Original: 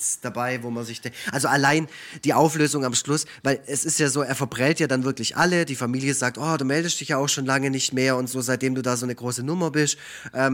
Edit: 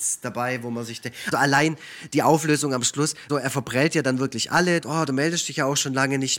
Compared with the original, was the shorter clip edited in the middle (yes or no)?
yes